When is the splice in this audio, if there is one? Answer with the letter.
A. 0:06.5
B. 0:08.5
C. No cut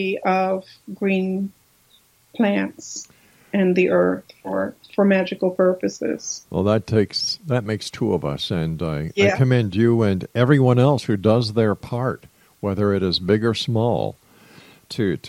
A